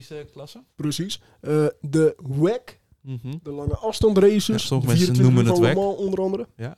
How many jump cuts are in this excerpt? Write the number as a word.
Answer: zero